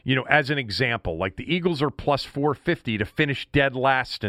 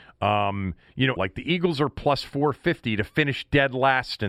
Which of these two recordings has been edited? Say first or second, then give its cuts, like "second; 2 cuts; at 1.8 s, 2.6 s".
second; 1 cut; at 1.2 s